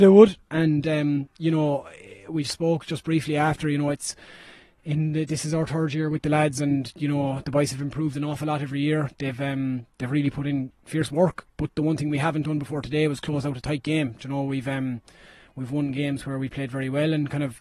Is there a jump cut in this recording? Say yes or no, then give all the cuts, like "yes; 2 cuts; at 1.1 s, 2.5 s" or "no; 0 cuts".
no; 0 cuts